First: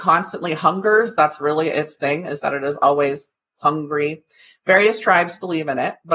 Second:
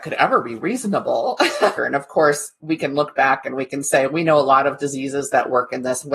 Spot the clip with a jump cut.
second; 1 cut; at 1.8 s

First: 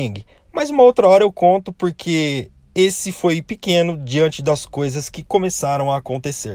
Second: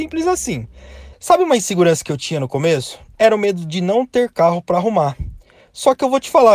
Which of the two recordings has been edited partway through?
second; 1 cut; at 1.1 s

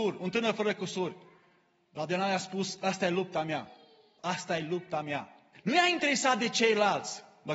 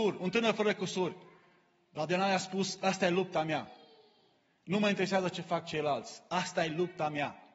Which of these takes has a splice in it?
first; 2 cuts; at 4.2 s, 5.5 s

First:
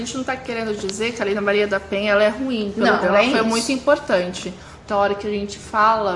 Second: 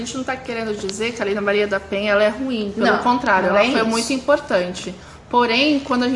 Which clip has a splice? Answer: first; 2 cuts; at 3.0 s, 4.9 s

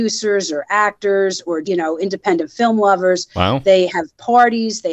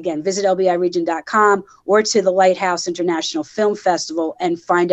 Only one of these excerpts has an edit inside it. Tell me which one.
first; 1 cut; at 1.6 s

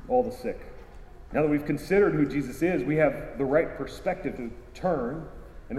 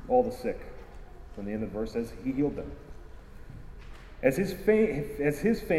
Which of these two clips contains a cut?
first; 2 cuts; at 1.3 s, 4.4 s

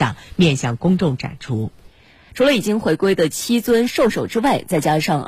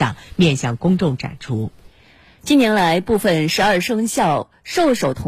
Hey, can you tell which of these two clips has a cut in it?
first; 1 cut; at 2.3 s

